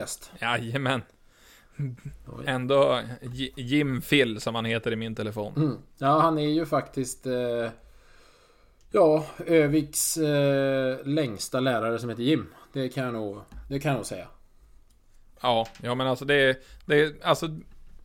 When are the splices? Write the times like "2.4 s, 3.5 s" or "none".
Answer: none